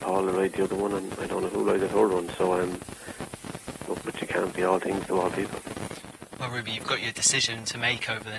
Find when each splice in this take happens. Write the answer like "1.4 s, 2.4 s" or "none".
4.0 s